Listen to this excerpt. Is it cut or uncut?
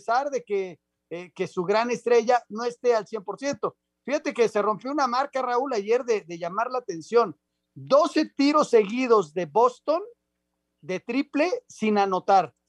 uncut